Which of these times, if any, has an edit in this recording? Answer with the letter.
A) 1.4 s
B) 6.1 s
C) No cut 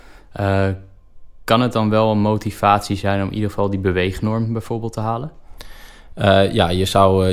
C